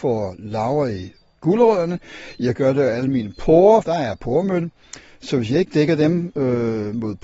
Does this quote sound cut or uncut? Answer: cut